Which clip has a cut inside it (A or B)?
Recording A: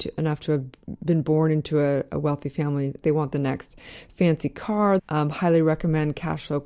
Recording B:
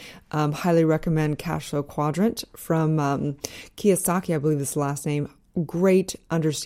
A